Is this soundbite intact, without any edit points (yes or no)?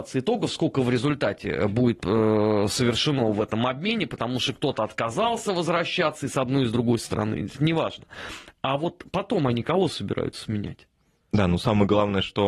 yes